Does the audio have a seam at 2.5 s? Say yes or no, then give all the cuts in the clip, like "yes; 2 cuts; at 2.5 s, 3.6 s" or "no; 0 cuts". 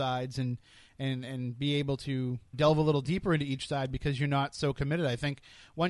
yes; 1 cut; at 2.5 s